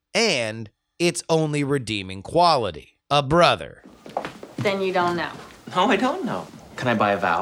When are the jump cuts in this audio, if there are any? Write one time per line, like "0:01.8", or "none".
0:03.0